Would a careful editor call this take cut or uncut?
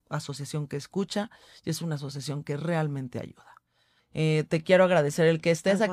cut